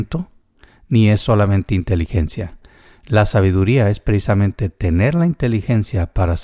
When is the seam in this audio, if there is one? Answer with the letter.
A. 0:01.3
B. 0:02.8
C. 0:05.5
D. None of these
D